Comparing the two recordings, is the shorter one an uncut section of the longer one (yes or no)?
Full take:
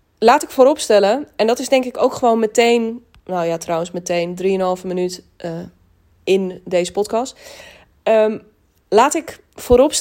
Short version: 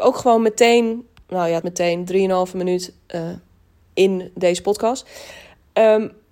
no